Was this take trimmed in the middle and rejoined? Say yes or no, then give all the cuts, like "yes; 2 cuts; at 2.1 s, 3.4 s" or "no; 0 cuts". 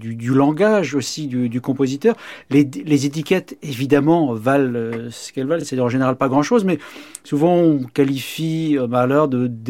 no; 0 cuts